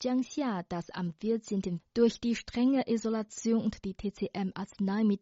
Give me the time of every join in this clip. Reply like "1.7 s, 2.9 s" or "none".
1.8 s

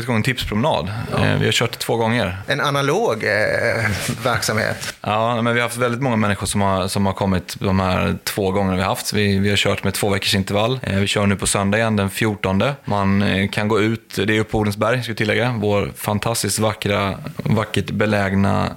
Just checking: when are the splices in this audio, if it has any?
none

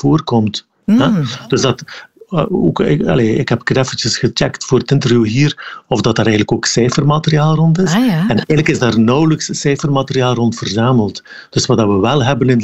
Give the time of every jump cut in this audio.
none

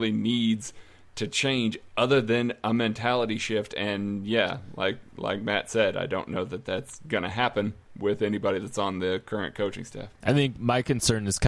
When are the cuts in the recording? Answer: none

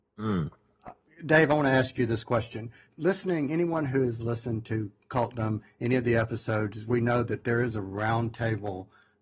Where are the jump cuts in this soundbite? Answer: none

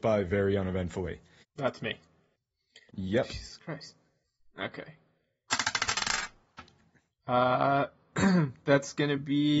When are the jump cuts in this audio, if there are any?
1.4 s, 2.9 s

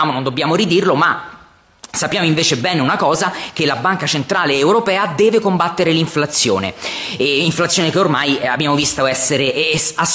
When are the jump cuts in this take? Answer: none

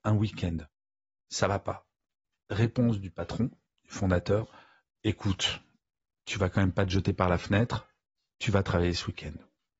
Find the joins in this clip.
1.2 s

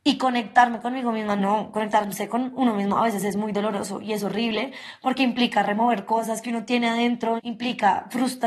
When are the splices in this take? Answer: 1.4 s, 7.4 s

